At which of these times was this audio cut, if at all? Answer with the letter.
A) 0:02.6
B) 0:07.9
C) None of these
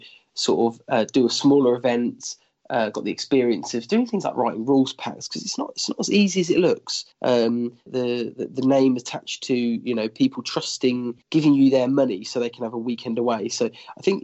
B